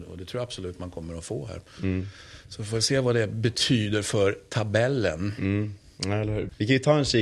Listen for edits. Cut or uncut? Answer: uncut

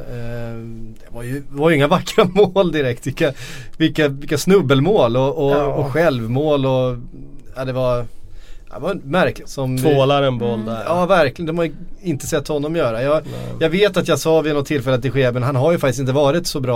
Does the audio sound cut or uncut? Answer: cut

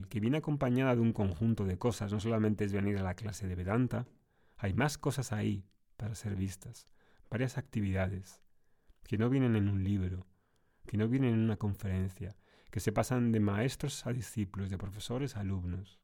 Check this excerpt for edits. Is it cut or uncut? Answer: uncut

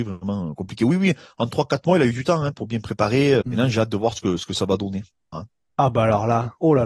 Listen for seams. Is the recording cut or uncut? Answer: cut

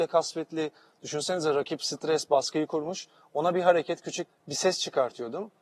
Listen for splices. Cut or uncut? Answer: cut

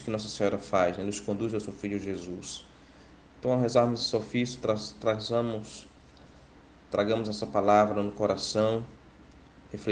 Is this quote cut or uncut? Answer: uncut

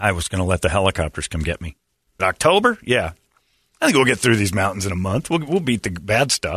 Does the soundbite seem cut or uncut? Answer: cut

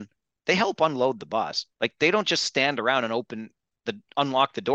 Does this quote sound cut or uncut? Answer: cut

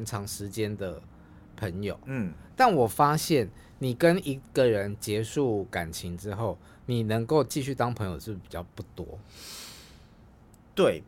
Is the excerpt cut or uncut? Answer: uncut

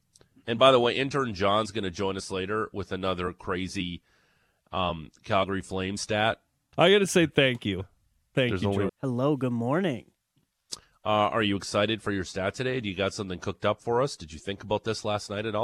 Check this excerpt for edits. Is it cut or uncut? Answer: cut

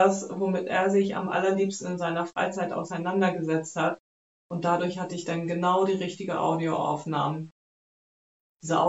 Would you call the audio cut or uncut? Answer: uncut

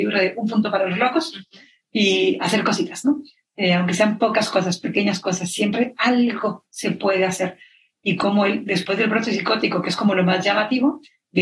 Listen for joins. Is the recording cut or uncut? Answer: uncut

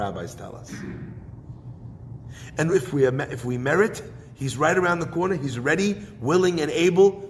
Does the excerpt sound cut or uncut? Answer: uncut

